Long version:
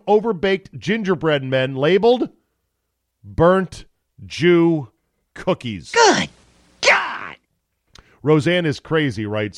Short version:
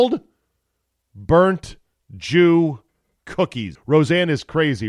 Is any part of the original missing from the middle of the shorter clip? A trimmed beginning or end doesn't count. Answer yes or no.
yes